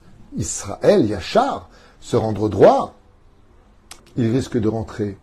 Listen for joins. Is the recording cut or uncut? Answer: cut